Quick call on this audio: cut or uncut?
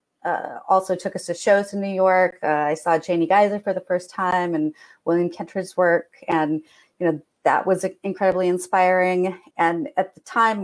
cut